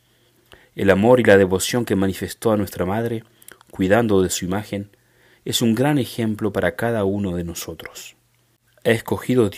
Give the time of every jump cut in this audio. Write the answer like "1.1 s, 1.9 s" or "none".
8.7 s